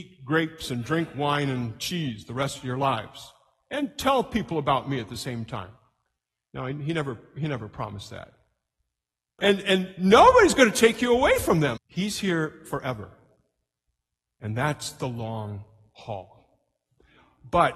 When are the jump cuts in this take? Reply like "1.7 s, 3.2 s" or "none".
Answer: 9.4 s, 11.8 s